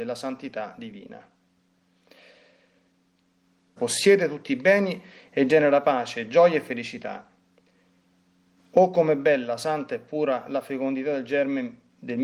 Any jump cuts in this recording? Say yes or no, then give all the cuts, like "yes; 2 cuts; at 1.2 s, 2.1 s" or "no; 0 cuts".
yes; 2 cuts; at 3.8 s, 8.6 s